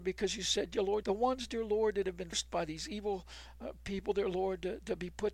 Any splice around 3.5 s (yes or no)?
no